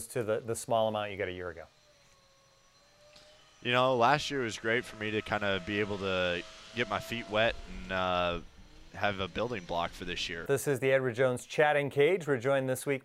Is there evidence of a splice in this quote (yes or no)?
yes